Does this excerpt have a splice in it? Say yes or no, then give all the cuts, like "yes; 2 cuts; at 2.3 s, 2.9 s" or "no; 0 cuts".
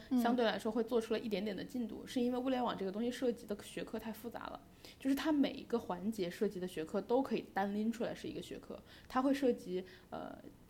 no; 0 cuts